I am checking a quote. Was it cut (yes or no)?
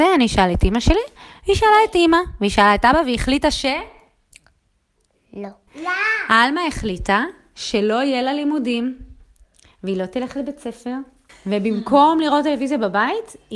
yes